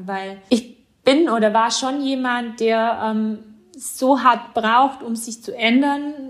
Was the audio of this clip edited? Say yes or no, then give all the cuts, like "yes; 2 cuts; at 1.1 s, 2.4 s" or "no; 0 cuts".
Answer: no; 0 cuts